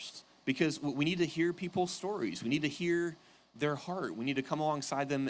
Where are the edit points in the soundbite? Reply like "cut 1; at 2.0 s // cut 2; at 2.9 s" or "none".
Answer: none